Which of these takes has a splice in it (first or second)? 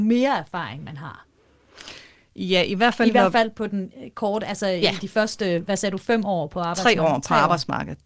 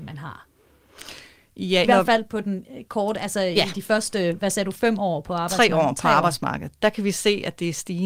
second